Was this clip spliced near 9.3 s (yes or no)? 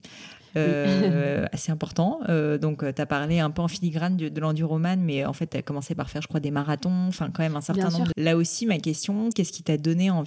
yes